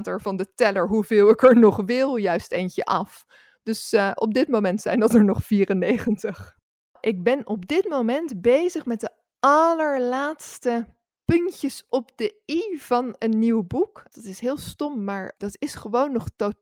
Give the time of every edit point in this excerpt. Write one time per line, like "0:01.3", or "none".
0:14.1
0:15.4

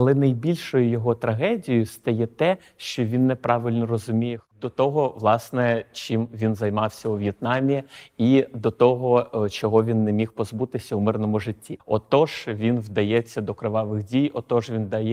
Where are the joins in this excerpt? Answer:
0:04.5
0:11.8

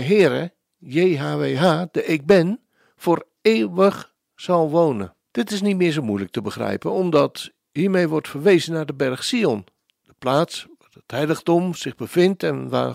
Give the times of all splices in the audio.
0:05.2

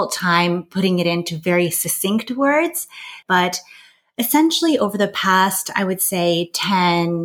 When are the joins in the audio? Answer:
0:03.2

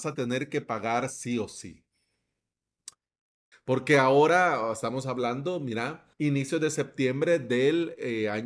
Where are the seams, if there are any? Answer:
0:03.5
0:06.1

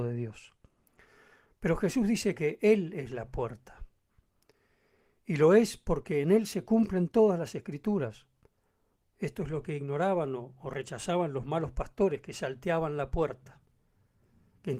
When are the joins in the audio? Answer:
0:09.0

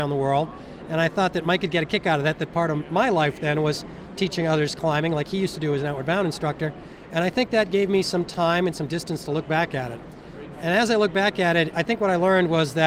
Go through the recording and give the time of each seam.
none

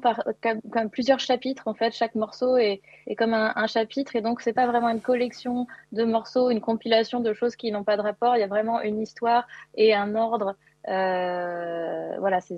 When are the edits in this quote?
none

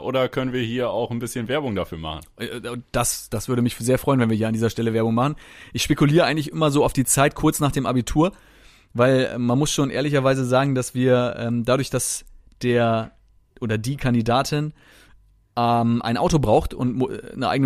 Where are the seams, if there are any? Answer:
none

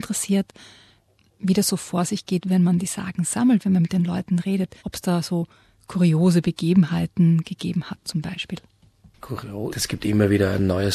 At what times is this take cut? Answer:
0:04.8
0:09.7

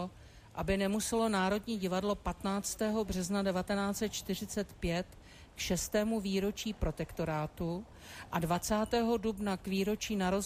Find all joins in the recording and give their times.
none

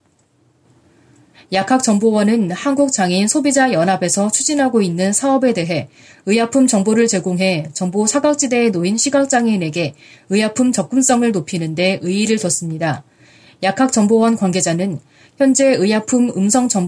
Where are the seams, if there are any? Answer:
0:01.3

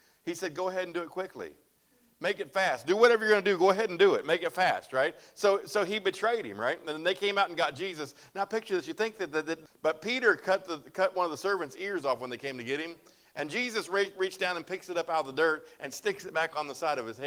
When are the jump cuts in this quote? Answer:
0:09.7

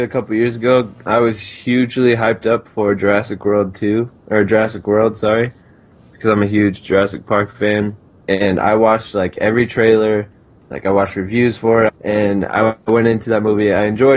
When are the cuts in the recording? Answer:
0:11.9

